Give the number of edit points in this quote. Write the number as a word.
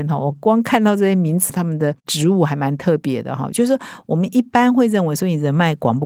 two